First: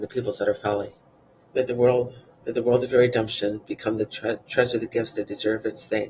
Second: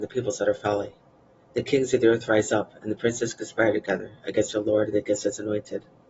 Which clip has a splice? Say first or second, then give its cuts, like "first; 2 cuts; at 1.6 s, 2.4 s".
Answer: first; 2 cuts; at 1.5 s, 4.4 s